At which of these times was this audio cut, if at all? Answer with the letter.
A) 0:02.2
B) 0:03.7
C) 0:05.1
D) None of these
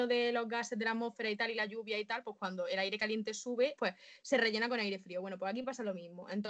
B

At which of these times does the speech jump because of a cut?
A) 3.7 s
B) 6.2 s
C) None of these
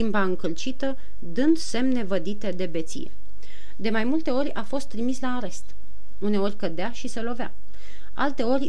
C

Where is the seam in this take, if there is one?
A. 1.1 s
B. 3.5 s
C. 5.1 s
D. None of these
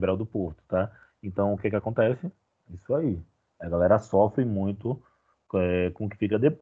D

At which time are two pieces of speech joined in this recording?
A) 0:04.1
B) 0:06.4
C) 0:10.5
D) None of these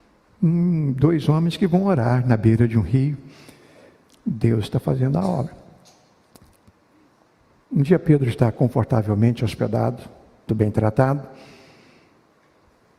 C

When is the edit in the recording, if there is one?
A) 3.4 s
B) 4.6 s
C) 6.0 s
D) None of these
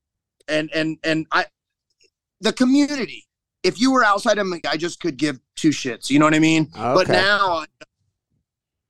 B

